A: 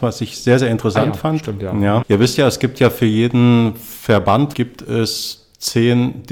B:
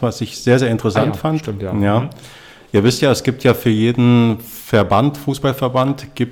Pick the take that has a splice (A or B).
A